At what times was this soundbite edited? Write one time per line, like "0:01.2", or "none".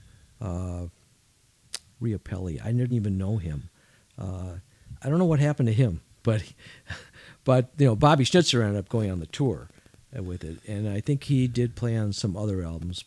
none